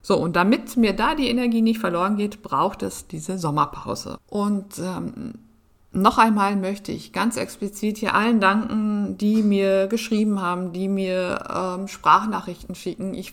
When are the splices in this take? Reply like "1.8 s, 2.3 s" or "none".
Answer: 4.2 s